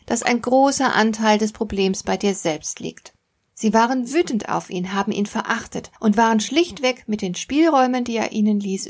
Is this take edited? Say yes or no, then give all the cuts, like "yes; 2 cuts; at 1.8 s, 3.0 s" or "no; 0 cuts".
yes; 1 cut; at 3.5 s